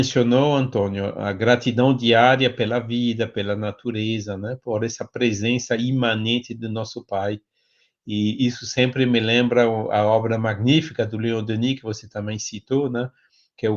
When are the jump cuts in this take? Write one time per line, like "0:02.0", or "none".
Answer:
none